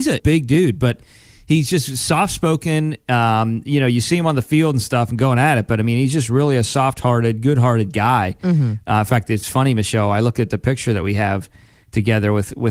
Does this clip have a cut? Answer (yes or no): no